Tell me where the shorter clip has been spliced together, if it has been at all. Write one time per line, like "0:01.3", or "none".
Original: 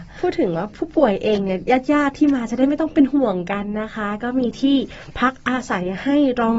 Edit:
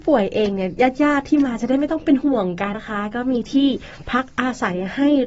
0:02.7